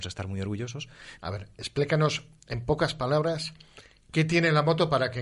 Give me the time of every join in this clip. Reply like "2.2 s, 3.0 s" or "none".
1.2 s